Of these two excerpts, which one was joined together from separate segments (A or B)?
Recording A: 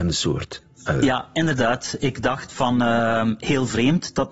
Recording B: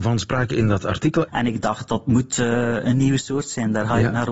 B